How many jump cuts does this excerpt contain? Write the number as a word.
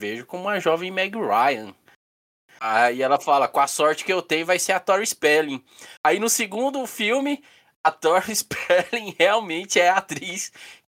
zero